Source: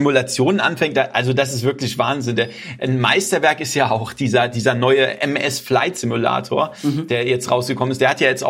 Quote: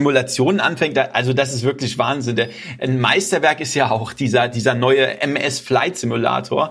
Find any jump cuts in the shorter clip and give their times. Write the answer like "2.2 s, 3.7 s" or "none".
none